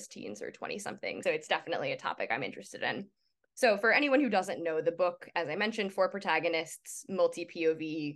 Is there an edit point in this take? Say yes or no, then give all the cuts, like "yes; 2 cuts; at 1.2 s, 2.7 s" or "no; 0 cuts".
yes; 1 cut; at 1.2 s